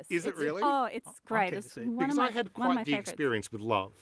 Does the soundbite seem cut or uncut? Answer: uncut